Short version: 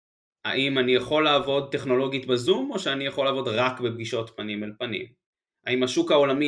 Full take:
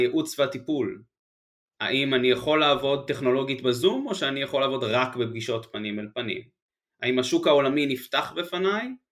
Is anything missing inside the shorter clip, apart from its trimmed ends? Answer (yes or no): no